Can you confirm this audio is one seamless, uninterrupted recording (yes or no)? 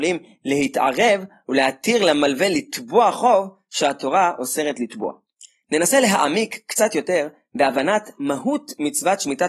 yes